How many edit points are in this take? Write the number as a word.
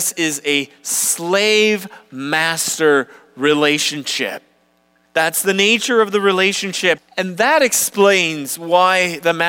two